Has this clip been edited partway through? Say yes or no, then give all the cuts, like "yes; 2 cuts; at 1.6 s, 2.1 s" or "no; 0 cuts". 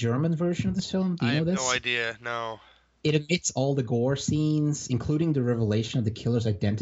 no; 0 cuts